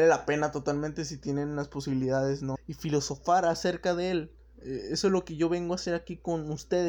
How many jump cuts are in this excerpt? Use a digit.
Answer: 1